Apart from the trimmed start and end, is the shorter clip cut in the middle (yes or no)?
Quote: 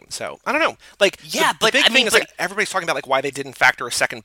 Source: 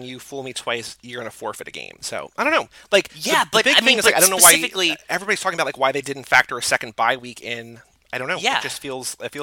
yes